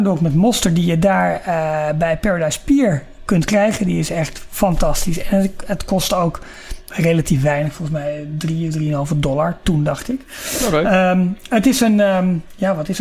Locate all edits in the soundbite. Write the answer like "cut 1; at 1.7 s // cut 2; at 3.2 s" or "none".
none

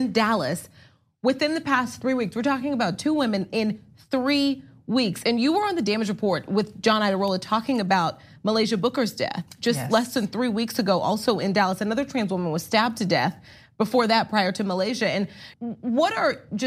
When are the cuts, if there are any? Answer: cut 1; at 15.5 s

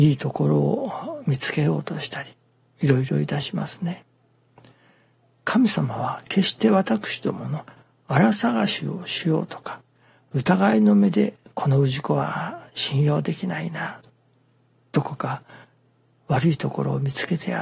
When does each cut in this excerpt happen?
none

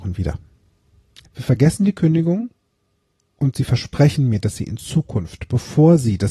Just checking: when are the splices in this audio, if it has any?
cut 1; at 1.2 s

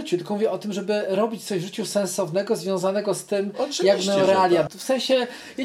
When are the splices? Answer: cut 1; at 4.7 s

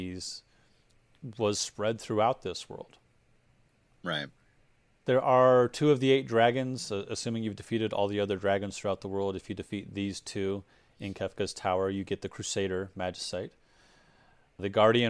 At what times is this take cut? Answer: none

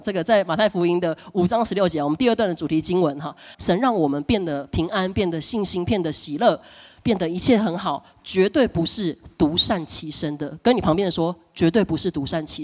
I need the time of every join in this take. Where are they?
cut 1; at 3.5 s

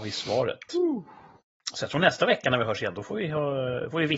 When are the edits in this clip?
none

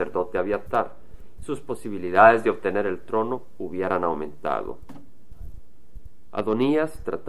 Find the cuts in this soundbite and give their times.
cut 1; at 1.4 s

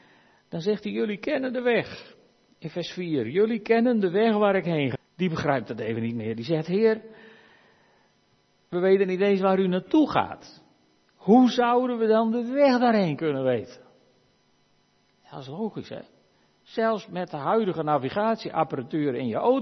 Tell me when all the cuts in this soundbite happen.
cut 1; at 4.9 s

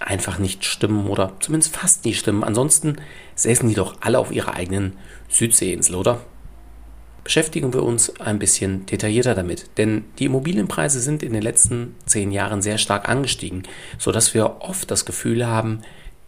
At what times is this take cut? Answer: none

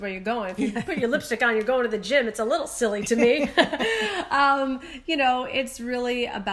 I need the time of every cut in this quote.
none

